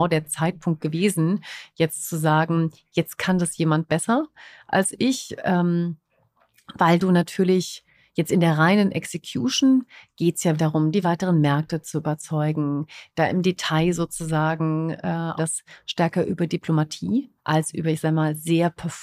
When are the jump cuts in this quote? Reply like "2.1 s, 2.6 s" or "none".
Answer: 10.6 s, 15.4 s, 17.4 s

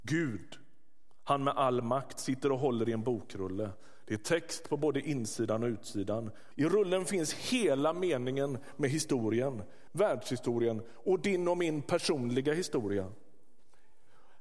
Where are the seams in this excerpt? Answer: 6.5 s, 9.9 s

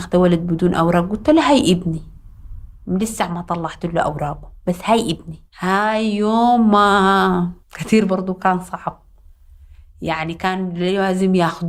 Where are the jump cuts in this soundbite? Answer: 5.5 s, 7.6 s

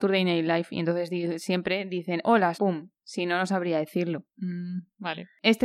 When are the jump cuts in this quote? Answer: 2.5 s

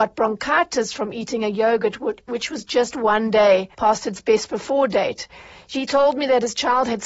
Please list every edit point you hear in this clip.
3.7 s

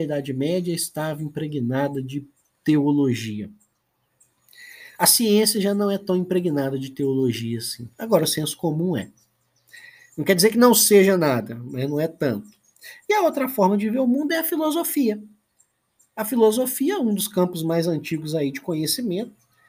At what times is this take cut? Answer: none

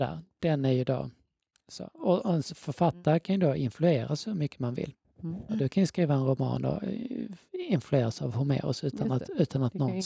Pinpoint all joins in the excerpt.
5.5 s, 7.5 s

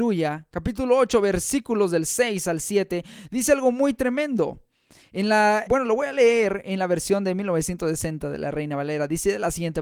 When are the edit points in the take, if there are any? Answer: 5.7 s

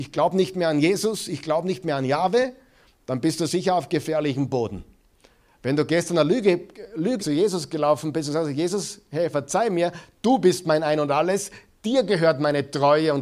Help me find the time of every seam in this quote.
7.2 s, 9.3 s

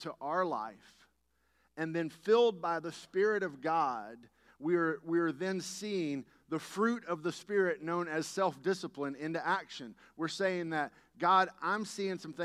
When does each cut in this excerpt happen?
none

